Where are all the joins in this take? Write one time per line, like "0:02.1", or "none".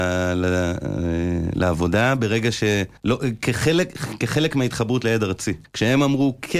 0:03.0
0:05.6